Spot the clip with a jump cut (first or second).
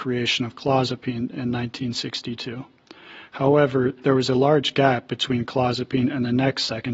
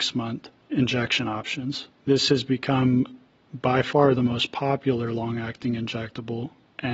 second